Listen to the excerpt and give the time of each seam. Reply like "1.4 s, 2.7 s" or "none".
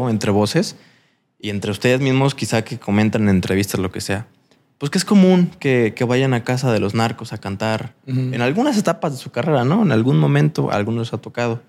none